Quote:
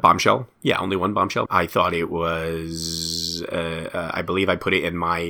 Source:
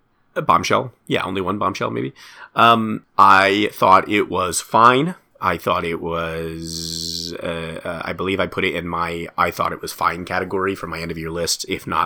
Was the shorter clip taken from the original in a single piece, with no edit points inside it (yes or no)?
no